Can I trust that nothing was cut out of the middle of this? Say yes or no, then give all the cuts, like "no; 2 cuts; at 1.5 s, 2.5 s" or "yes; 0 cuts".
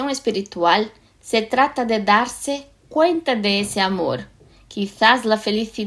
yes; 0 cuts